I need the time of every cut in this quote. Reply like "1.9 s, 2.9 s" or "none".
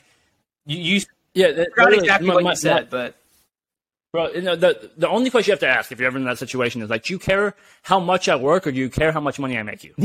none